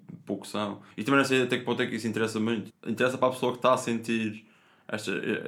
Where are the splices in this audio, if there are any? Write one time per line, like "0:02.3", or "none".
0:00.9
0:02.7